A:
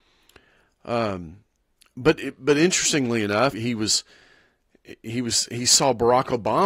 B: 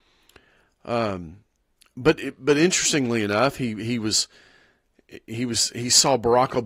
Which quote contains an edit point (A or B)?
A